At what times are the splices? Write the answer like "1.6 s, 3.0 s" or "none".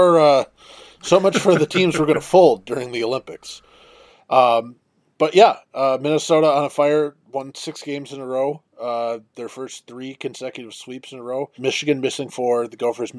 11.6 s